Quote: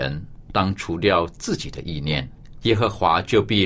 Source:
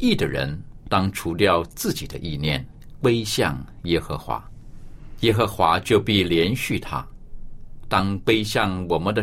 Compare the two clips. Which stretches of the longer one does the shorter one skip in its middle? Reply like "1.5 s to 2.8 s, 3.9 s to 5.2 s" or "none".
3.0 s to 5.2 s